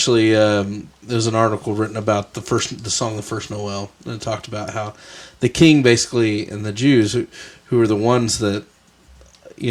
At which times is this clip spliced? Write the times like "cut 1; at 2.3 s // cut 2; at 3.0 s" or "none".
none